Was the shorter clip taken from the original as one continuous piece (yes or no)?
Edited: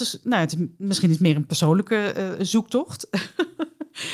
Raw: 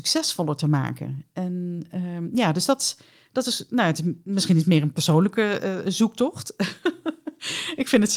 yes